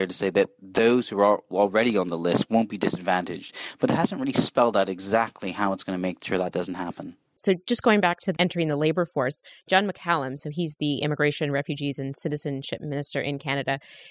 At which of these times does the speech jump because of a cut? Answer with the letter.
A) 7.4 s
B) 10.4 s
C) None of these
A